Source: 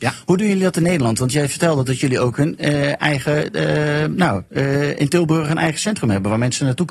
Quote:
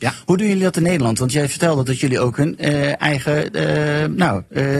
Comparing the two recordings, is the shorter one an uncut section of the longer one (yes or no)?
yes